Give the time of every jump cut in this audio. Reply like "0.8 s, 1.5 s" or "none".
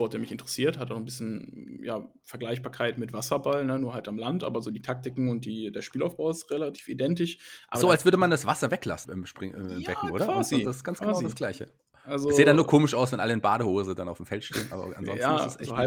9.0 s